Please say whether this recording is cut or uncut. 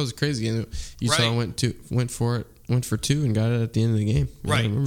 uncut